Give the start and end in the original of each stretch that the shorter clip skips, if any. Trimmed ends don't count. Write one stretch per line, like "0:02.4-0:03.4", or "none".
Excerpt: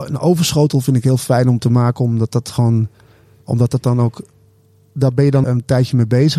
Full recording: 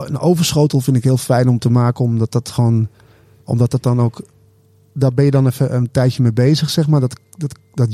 0:05.4-0:05.7

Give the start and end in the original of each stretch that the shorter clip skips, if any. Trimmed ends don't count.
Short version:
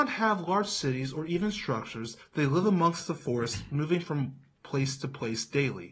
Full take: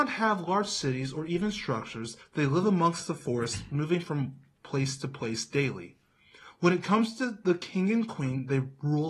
none

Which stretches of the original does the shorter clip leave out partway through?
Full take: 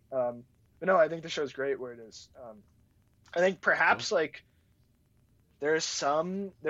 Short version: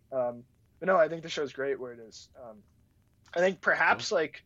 none

